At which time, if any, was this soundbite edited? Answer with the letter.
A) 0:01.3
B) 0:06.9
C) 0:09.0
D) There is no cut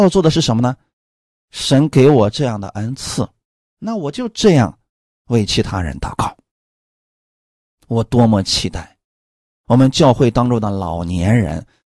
D